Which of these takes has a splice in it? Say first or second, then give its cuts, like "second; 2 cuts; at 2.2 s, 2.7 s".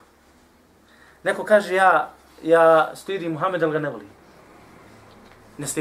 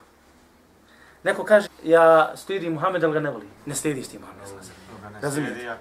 second; 2 cuts; at 1.7 s, 3.6 s